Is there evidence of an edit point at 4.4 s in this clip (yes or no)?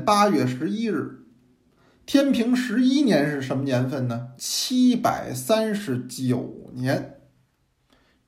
yes